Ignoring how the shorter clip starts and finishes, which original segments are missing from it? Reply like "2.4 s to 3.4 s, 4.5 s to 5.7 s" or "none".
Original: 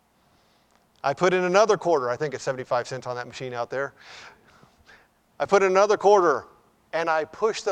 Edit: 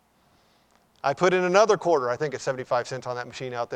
none